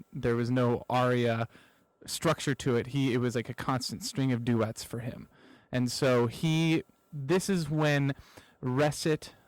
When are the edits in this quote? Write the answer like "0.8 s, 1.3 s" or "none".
none